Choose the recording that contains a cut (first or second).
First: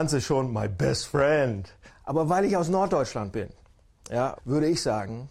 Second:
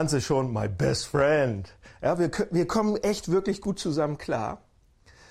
first